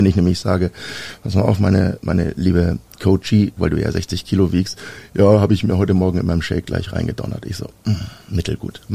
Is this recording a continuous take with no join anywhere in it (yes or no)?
no